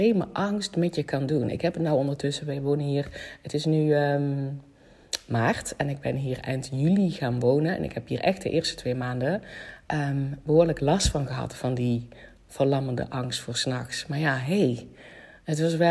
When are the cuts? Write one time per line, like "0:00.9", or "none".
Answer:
none